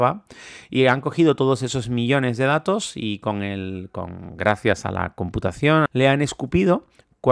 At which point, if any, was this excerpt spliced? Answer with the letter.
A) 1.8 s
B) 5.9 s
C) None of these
B